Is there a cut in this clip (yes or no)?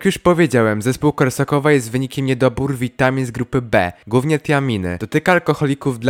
no